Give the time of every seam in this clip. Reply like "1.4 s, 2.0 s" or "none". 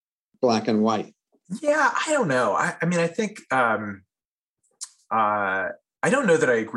none